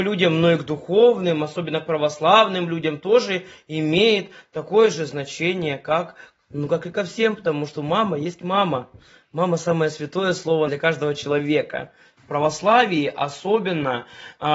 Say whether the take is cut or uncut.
cut